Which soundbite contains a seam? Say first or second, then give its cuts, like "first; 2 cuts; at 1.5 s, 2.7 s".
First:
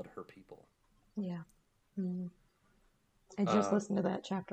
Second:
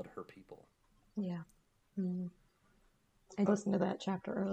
second; 1 cut; at 3.5 s